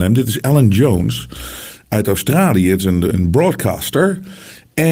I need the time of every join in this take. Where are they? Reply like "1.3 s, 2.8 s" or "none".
3.1 s

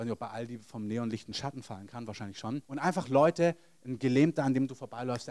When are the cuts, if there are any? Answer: 2.6 s

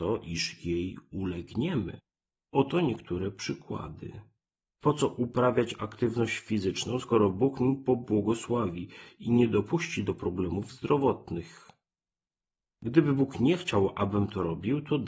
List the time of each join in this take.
2.4 s, 4.6 s

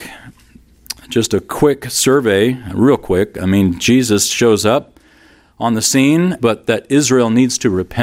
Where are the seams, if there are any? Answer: 6.4 s

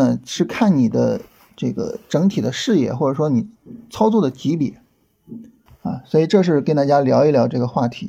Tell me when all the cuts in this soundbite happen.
5.7 s

